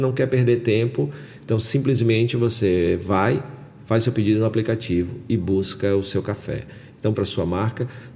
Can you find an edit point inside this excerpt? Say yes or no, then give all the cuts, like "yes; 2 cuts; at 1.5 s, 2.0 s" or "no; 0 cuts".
yes; 1 cut; at 7.1 s